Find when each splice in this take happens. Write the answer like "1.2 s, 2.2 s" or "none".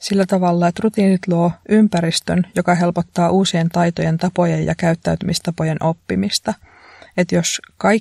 none